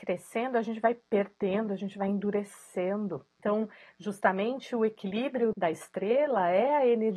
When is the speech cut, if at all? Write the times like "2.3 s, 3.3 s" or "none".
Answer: 5.5 s